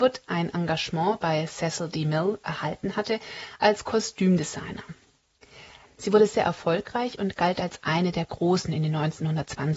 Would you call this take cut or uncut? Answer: cut